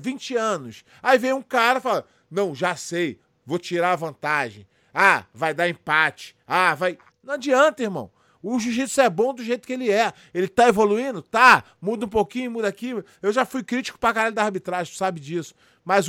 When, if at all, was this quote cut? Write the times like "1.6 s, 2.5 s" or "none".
none